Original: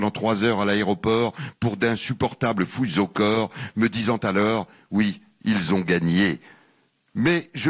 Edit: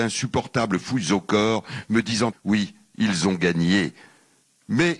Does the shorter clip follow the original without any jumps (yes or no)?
no